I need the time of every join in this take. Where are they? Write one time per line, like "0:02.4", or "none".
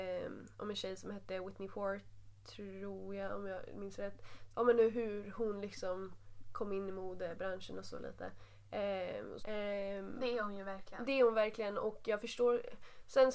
0:04.5
0:09.4